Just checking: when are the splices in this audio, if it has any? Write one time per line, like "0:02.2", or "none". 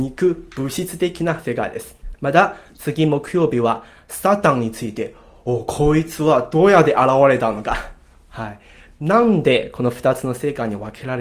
0:02.1

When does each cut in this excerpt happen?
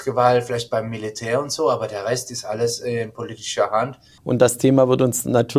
0:04.2

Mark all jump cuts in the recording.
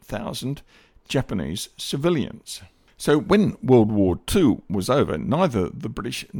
none

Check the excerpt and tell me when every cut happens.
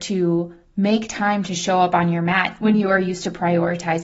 0:02.6

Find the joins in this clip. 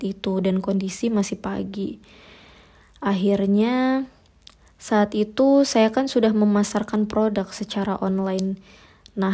none

